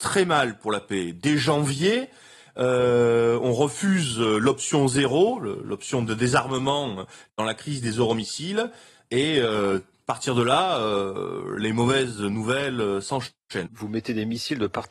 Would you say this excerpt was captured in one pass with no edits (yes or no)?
no